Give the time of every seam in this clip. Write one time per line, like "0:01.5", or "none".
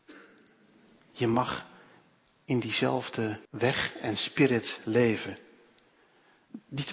0:01.1
0:03.5